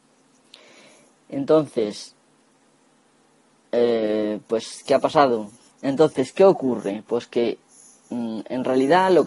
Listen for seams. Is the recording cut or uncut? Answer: cut